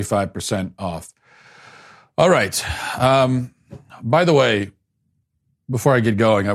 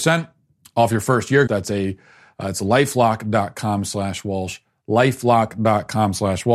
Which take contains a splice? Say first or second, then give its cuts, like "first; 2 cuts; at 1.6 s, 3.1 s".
second; 1 cut; at 1.5 s